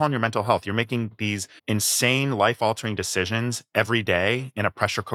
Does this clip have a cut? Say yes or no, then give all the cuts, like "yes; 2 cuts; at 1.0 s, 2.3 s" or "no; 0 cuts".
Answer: yes; 1 cut; at 1.6 s